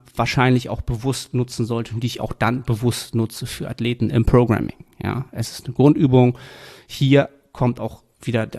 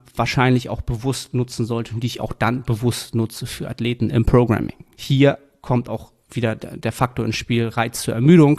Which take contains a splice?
second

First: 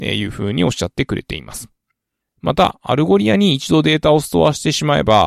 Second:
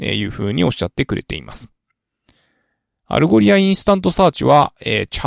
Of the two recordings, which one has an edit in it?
first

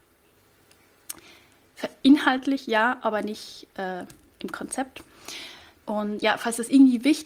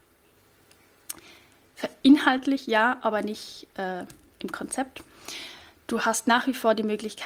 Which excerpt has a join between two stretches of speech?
first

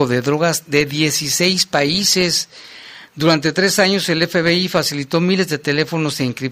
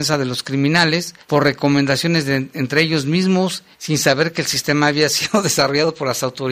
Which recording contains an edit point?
second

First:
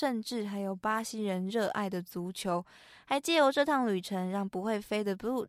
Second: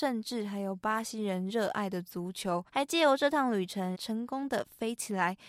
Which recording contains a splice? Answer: second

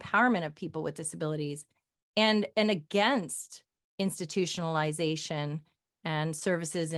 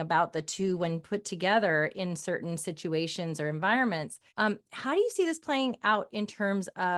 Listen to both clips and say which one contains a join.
second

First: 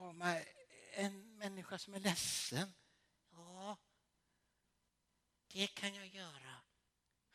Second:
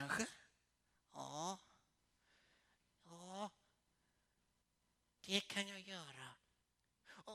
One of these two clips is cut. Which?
second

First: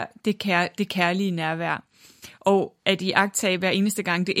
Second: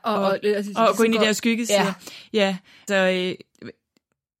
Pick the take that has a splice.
second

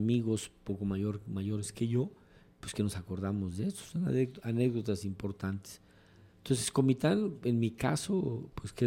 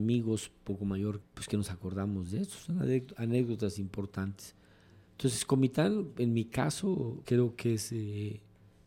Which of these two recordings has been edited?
second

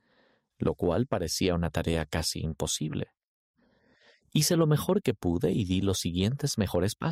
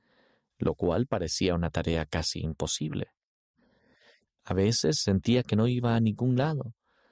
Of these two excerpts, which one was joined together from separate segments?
second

